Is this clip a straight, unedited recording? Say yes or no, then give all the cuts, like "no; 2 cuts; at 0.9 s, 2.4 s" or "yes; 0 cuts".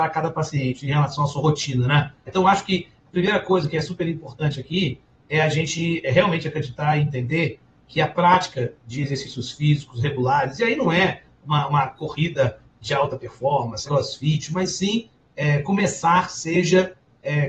no; 2 cuts; at 2.3 s, 13.9 s